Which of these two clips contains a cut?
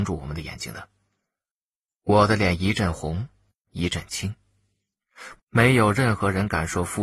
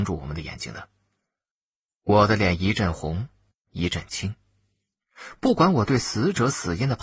first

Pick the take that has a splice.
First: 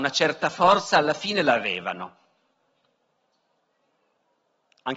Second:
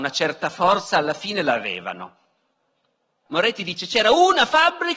second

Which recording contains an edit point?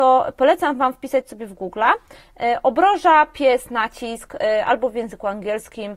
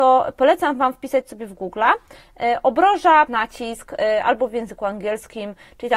second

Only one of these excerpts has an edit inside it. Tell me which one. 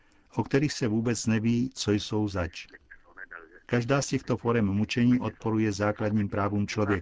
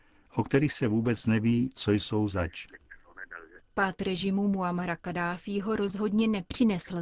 second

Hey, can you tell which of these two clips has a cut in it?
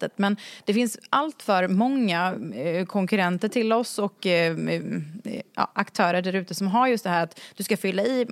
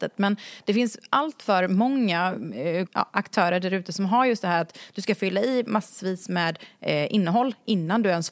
second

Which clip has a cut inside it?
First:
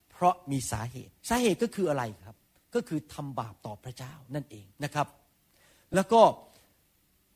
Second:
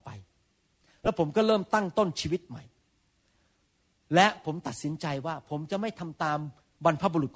first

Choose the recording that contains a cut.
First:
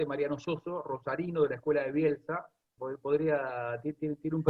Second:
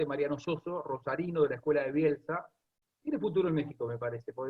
first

